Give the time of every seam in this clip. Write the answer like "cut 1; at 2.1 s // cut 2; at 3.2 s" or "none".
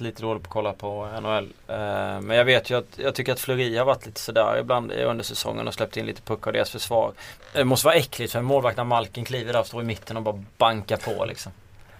cut 1; at 7.4 s